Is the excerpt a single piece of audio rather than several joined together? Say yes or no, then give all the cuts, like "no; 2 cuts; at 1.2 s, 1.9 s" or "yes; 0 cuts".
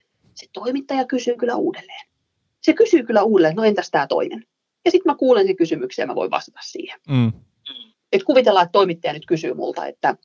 no; 1 cut; at 8.0 s